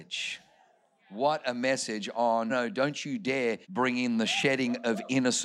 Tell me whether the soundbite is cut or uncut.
cut